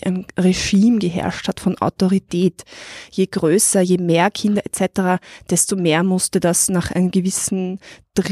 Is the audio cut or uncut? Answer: uncut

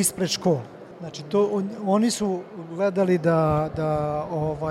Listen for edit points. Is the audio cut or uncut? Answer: cut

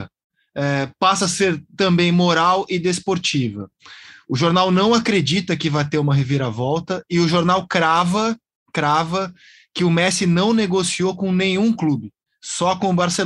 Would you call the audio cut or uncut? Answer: uncut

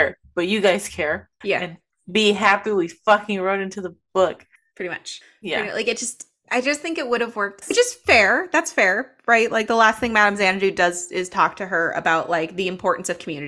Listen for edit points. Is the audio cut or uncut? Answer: cut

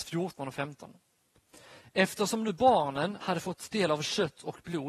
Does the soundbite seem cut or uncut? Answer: cut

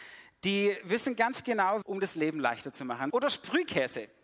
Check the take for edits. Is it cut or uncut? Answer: cut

